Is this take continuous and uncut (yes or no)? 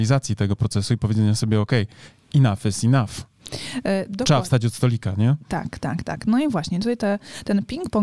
yes